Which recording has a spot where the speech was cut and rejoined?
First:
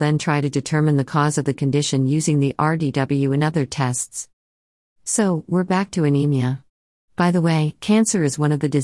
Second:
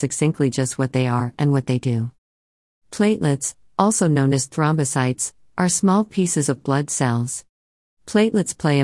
second; 1 cut; at 7.8 s

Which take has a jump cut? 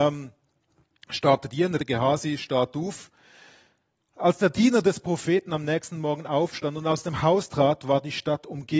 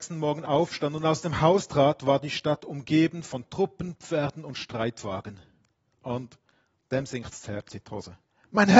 first; 1 cut; at 1.8 s

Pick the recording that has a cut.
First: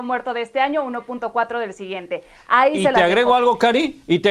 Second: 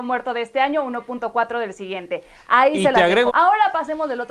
second; 1 cut; at 3.3 s

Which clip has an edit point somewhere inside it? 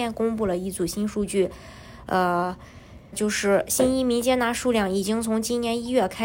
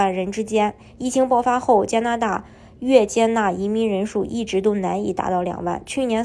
first; 1 cut; at 3.1 s

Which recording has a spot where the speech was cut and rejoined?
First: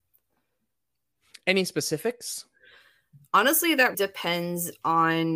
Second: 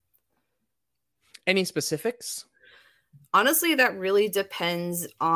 first; 1 cut; at 3.9 s

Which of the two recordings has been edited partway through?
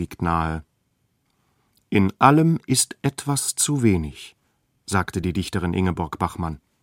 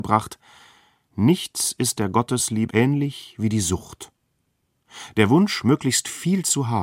second; 1 cut; at 2.7 s

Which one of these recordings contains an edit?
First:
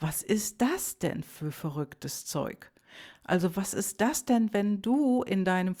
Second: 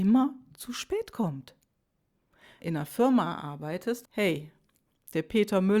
second; 2 cuts; at 2.6 s, 4.0 s

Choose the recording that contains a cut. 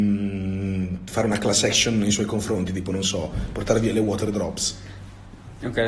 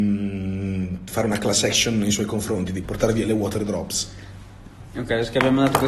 second; 1 cut; at 2.8 s

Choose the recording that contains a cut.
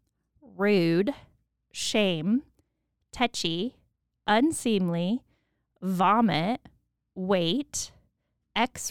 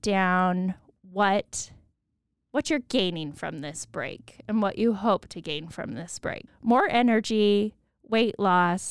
second; 1 cut; at 6.5 s

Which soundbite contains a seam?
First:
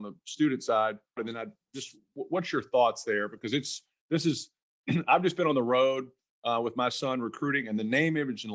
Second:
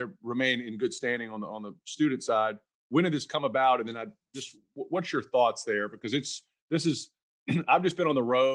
first; 1 cut; at 1.2 s

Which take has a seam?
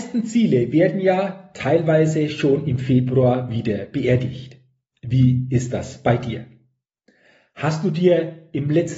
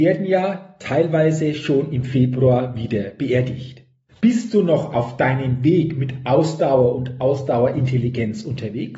second; 1 cut; at 4.1 s

